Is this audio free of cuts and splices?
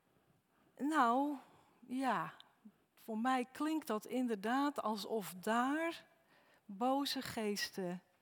yes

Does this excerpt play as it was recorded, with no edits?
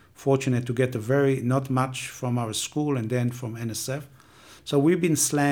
no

